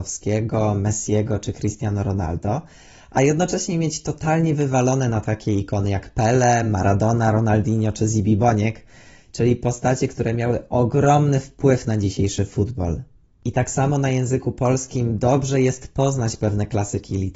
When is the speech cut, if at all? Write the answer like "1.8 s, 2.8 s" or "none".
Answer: none